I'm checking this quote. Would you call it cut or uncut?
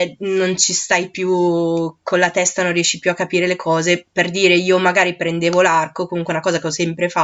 uncut